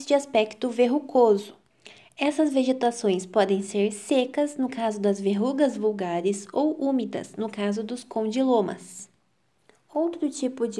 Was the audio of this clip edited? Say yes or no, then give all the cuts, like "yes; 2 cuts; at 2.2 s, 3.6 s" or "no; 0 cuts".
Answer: no; 0 cuts